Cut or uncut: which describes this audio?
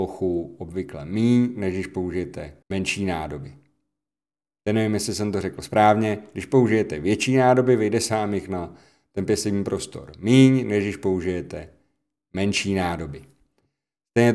cut